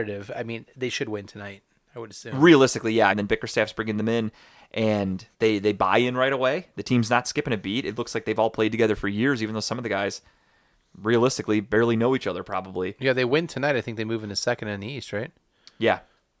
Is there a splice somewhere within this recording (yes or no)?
yes